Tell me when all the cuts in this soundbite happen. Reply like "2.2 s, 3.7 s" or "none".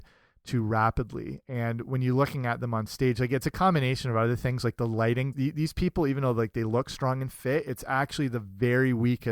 5.3 s